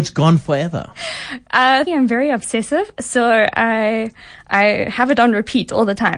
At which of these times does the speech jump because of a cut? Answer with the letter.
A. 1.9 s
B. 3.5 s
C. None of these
A